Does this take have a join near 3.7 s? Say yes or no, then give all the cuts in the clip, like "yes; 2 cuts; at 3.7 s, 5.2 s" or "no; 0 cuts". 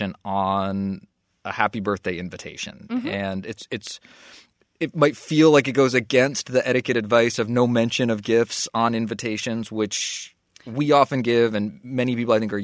no; 0 cuts